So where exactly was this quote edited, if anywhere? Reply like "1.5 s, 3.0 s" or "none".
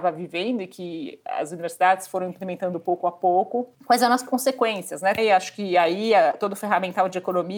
3.7 s, 5.2 s

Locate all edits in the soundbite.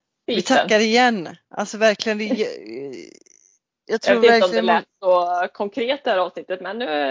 none

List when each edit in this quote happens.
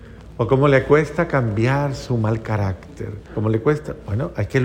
3.3 s

